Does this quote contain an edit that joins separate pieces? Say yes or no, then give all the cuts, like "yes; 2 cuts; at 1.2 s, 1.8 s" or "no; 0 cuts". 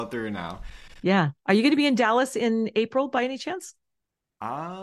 yes; 1 cut; at 1.0 s